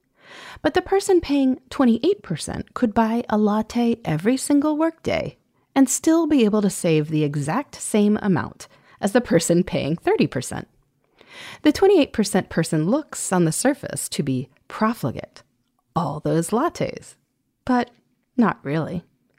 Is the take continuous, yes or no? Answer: yes